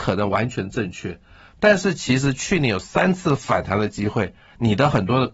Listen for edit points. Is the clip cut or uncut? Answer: uncut